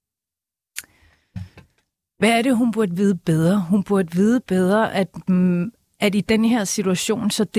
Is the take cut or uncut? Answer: uncut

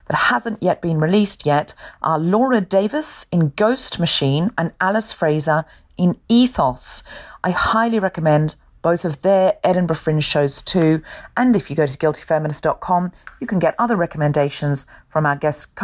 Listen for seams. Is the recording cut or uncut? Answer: uncut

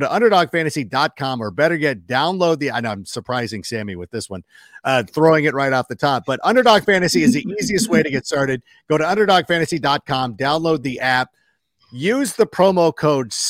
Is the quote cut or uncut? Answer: uncut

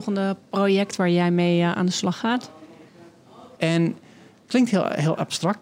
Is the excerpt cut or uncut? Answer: cut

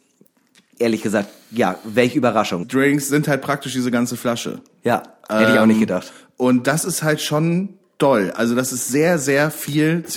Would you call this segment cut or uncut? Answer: cut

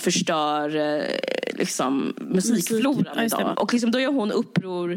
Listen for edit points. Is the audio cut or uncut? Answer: cut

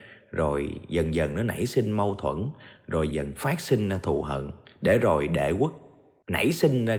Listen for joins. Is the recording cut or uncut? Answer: cut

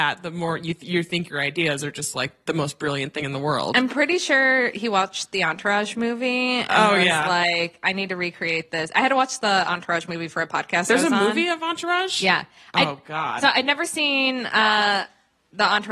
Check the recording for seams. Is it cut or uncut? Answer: uncut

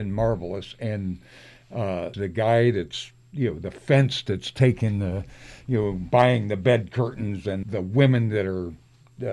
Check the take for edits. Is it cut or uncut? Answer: cut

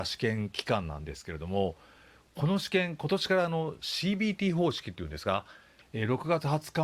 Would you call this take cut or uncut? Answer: cut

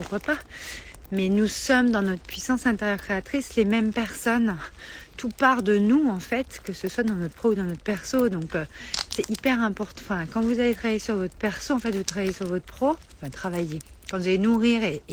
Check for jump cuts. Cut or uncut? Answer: uncut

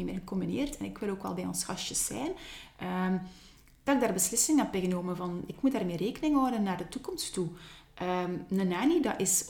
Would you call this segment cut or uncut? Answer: uncut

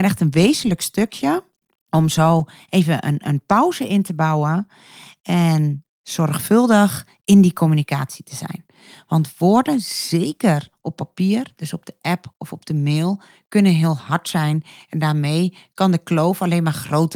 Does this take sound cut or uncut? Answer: uncut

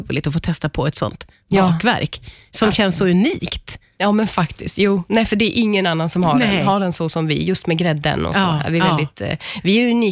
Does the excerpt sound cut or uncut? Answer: uncut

